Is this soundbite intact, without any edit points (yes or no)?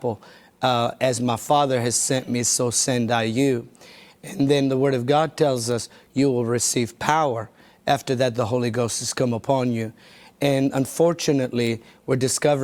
yes